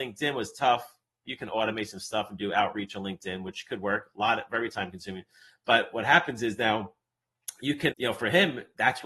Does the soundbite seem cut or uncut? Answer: cut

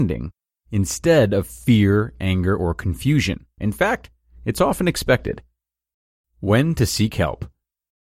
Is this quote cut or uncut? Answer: cut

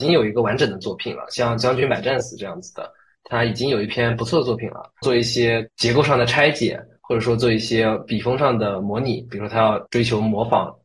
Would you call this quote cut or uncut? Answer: cut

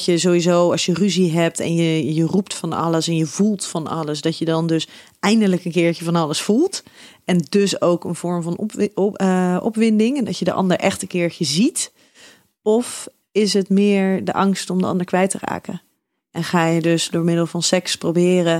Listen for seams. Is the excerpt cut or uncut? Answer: uncut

